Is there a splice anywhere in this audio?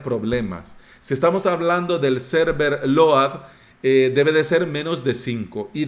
no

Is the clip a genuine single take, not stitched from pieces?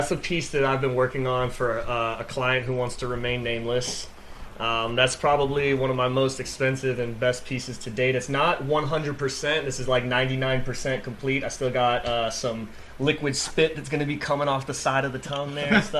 yes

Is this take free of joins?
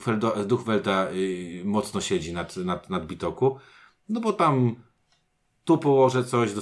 yes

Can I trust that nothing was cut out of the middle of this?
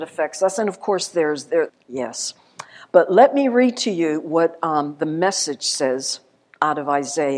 no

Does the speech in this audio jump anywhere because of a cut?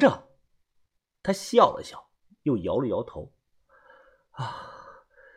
no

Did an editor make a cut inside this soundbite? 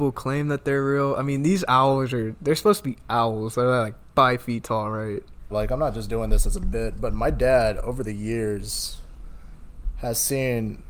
yes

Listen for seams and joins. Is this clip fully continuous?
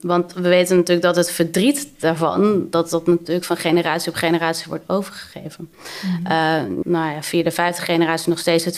no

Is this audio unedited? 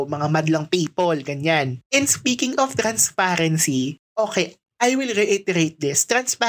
yes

